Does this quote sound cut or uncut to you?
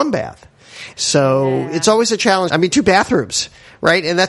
cut